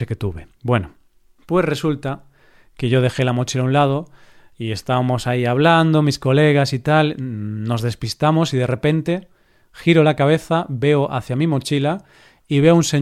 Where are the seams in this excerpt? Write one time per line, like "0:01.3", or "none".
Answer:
none